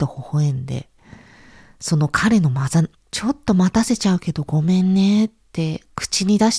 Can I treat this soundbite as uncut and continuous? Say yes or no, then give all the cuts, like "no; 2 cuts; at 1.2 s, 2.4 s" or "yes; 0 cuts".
no; 1 cut; at 2.9 s